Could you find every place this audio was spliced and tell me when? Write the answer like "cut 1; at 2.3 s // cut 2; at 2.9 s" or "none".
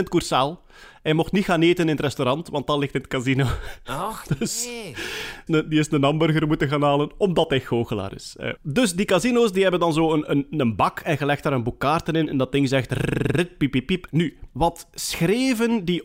cut 1; at 5.5 s // cut 2; at 8.6 s